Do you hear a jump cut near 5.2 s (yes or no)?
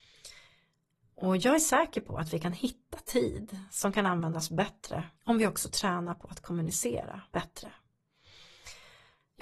yes